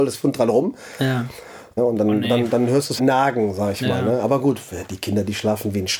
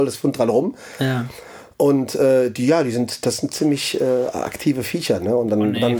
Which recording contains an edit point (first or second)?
first